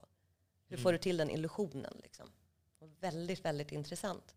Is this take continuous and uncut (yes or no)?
yes